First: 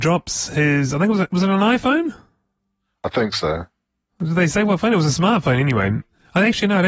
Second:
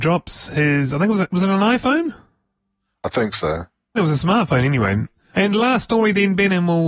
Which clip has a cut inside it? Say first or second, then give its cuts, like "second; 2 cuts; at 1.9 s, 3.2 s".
second; 2 cuts; at 4.0 s, 5.3 s